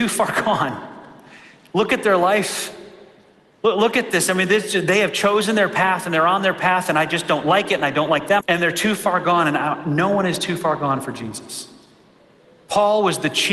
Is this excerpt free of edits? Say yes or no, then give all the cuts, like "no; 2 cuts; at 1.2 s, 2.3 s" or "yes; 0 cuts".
no; 1 cut; at 8.4 s